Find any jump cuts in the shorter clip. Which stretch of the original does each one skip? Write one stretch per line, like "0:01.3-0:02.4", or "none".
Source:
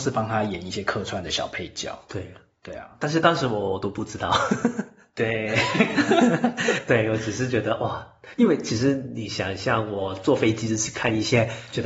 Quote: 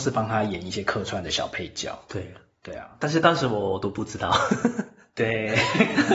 none

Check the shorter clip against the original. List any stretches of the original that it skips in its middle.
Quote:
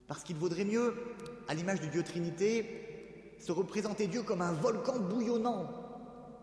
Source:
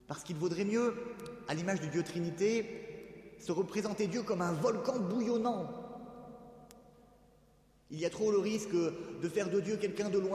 none

